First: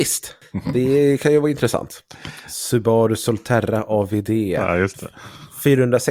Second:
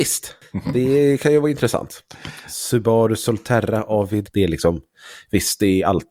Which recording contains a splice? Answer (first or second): second